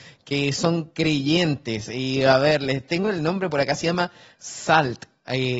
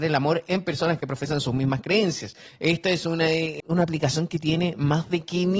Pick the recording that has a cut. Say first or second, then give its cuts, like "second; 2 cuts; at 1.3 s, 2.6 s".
second; 2 cuts; at 2.5 s, 3.6 s